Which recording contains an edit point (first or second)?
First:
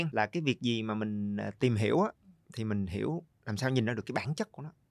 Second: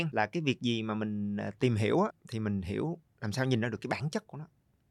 second